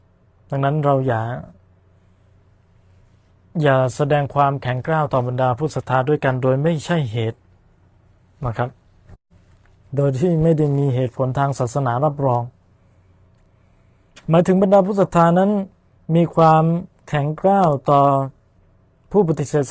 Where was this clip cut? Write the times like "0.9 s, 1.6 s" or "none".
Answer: none